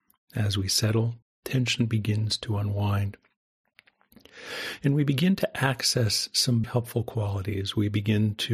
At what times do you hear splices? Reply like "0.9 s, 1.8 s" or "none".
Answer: 1.2 s, 6.6 s